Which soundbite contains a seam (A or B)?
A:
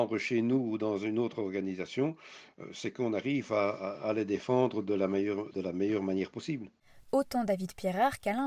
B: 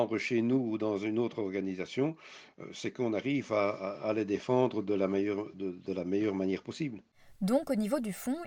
A